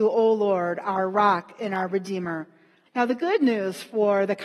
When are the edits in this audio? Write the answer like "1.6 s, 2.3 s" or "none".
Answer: 2.9 s